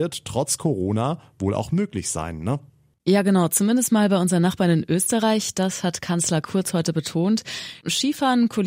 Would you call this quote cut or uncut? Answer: uncut